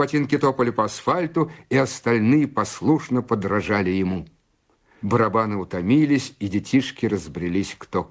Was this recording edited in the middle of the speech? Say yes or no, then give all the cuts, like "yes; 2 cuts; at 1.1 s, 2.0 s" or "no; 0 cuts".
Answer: yes; 1 cut; at 5.0 s